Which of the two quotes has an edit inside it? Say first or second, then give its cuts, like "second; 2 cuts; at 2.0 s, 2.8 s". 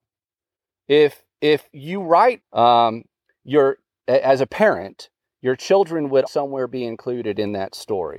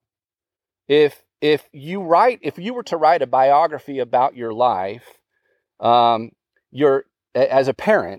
first; 2 cuts; at 2.4 s, 6.3 s